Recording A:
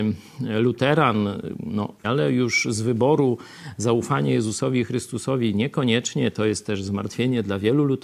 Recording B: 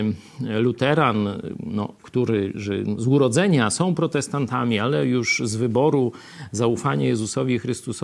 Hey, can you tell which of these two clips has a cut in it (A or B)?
A